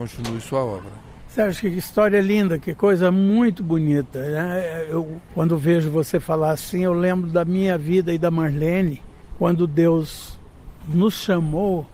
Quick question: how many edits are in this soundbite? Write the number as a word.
zero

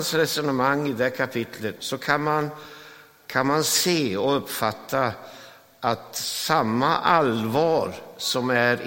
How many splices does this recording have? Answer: one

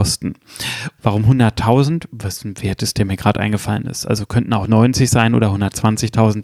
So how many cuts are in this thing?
one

